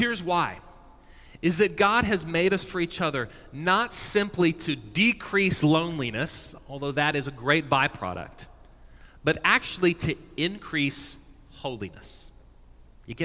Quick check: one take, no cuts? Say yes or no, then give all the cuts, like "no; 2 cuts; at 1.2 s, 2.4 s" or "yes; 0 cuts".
yes; 0 cuts